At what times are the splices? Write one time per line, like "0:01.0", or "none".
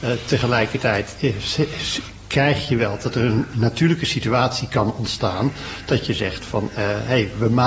none